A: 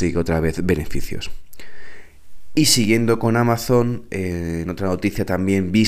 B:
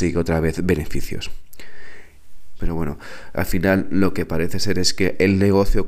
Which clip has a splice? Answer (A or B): B